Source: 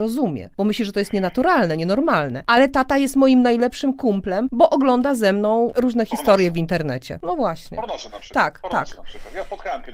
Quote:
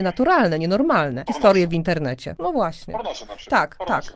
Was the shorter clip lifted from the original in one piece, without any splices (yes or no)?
no